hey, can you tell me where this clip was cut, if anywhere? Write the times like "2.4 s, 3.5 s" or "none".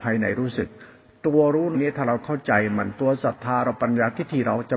1.7 s